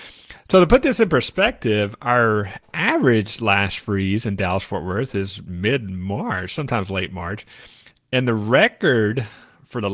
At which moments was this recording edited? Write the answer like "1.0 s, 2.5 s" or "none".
none

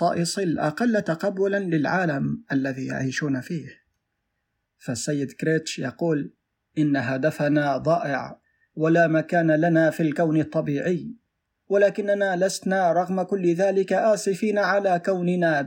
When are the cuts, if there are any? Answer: 4.6 s

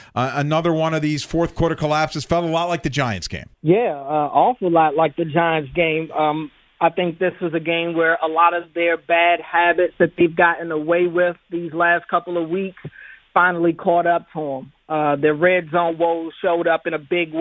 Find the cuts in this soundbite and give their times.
3.5 s

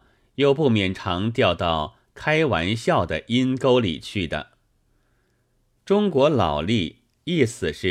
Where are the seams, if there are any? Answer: 0.9 s, 5.8 s

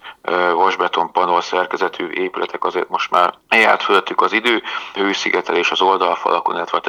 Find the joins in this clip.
3.4 s, 5.0 s

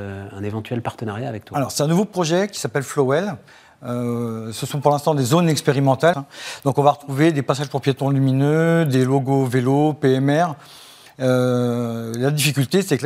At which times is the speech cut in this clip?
6.1 s

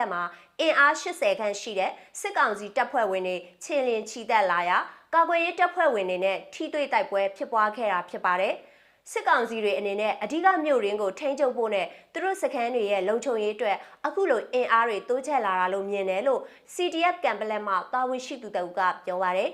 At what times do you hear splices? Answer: none

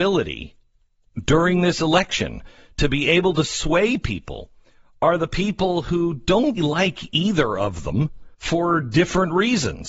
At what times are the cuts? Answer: 6.6 s, 8.3 s

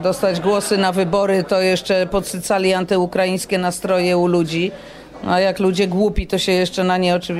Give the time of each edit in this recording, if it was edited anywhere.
none

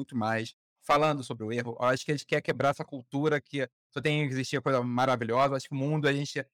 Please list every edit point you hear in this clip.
none

